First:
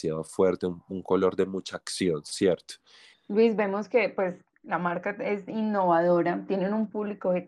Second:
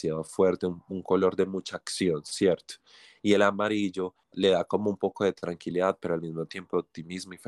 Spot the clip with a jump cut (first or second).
first